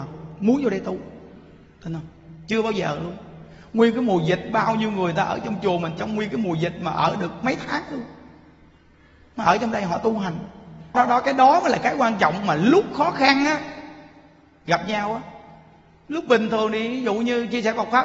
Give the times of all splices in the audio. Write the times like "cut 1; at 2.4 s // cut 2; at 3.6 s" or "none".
cut 1; at 10.9 s